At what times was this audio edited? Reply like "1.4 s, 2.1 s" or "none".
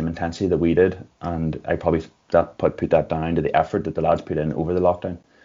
none